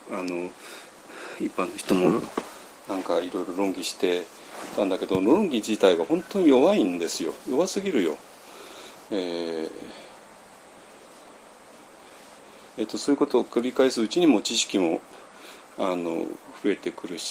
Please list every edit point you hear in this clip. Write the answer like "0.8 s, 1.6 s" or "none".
9.1 s, 12.7 s